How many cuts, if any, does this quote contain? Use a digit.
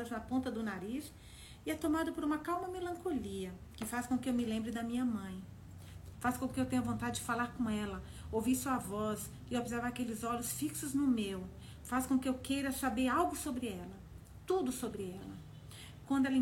1